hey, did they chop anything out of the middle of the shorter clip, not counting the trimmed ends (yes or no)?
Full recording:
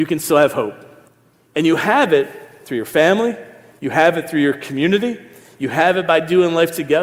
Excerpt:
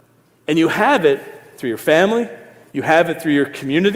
no